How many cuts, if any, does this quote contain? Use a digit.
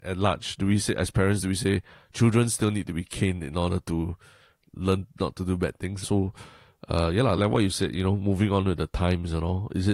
2